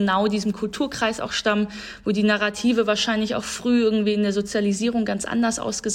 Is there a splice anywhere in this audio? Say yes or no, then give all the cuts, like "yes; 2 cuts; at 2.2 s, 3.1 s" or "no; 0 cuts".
no; 0 cuts